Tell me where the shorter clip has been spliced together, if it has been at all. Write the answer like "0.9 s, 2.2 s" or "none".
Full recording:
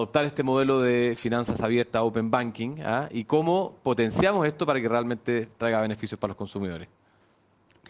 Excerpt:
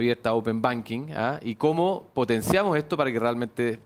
none